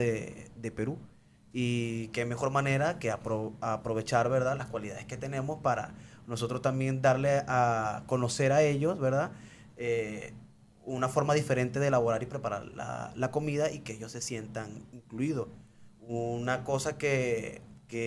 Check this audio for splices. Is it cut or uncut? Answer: uncut